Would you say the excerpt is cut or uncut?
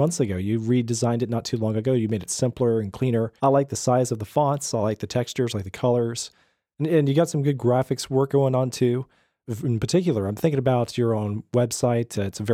cut